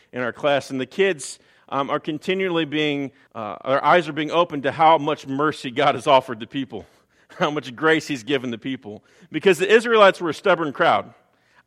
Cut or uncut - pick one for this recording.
cut